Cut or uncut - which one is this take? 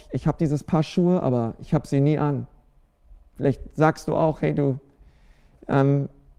uncut